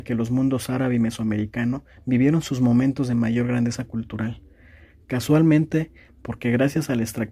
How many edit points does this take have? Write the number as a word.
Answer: one